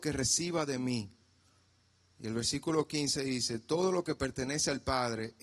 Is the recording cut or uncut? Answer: uncut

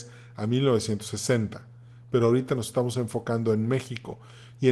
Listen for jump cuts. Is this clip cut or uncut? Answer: uncut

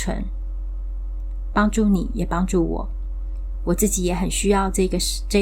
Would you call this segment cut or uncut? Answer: uncut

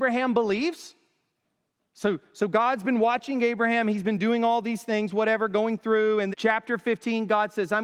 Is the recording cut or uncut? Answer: cut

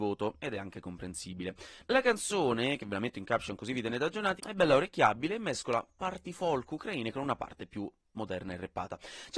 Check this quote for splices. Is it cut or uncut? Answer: cut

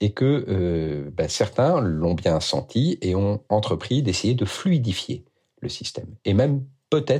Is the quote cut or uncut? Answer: uncut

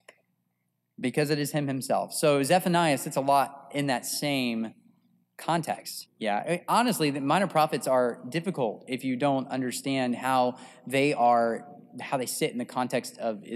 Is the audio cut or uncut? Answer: cut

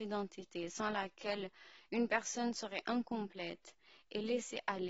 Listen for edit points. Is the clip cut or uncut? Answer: uncut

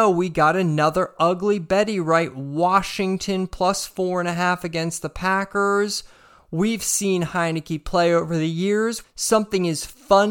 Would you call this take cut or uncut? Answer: cut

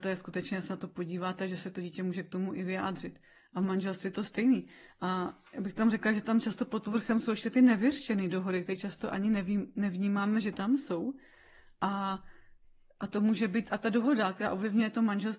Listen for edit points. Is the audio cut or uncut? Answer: uncut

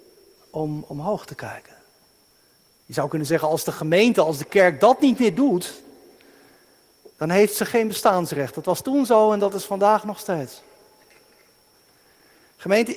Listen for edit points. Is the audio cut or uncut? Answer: cut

